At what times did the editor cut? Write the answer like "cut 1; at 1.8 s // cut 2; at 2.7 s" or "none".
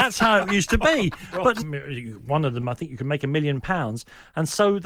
cut 1; at 1.6 s

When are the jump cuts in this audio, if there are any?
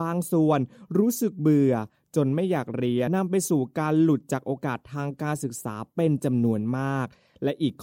cut 1; at 3.1 s

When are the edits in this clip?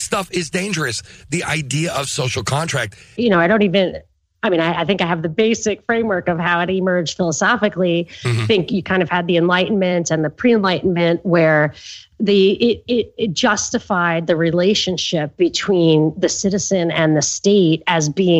cut 1; at 3.2 s

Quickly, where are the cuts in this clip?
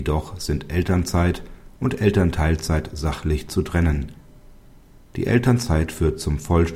none

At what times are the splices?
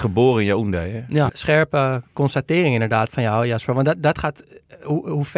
cut 1; at 1.3 s

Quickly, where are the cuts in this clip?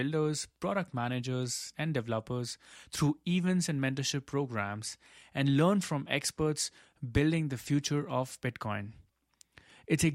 cut 1; at 1.7 s

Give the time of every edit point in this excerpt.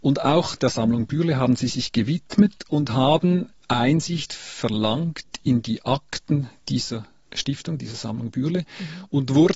none

